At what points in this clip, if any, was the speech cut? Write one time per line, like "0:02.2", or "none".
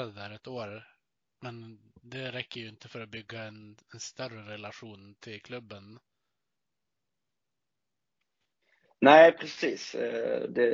none